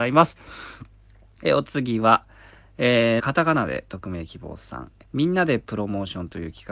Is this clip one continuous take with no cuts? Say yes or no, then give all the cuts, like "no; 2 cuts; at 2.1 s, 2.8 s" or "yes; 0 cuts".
no; 2 cuts; at 3.2 s, 5.0 s